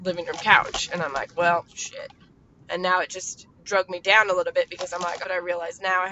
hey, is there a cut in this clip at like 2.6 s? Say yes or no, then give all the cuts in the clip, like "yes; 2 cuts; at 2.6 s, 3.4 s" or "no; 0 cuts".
yes; 2 cuts; at 2.6 s, 5.2 s